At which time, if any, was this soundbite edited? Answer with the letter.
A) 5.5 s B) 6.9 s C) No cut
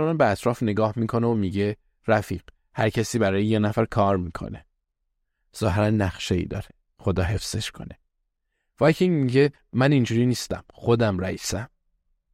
C